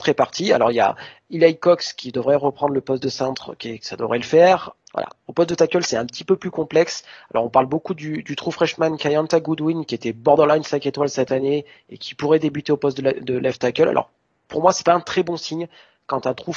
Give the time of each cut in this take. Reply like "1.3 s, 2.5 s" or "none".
4.8 s